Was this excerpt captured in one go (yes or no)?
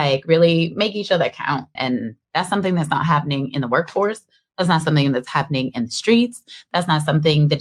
no